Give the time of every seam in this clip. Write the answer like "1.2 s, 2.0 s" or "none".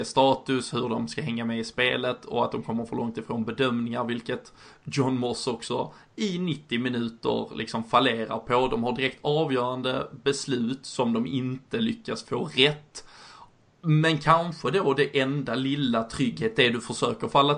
none